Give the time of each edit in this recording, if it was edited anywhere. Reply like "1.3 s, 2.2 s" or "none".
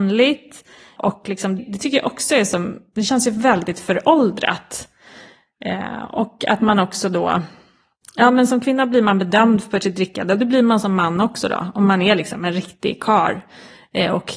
1.6 s